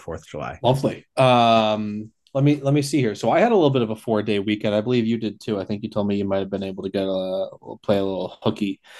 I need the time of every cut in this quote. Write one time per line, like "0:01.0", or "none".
0:01.1